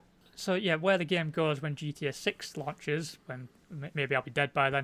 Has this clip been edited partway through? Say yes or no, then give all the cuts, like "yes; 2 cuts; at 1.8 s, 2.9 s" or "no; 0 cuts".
no; 0 cuts